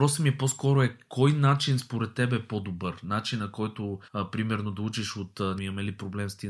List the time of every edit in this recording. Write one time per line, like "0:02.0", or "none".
0:04.1
0:05.6

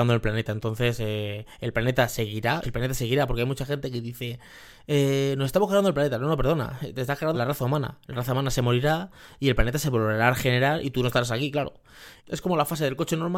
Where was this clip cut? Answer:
0:02.6
0:07.3
0:12.2

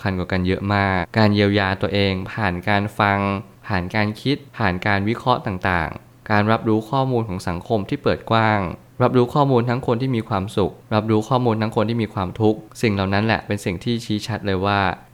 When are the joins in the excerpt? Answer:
0:01.0

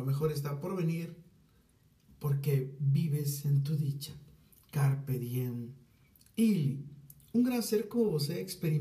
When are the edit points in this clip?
none

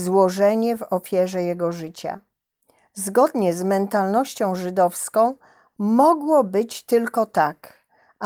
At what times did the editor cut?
none

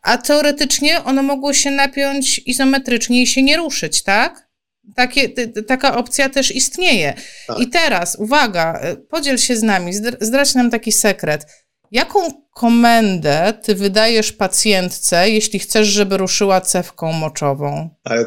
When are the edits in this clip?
none

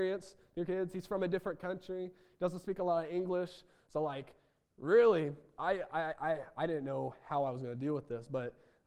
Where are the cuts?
none

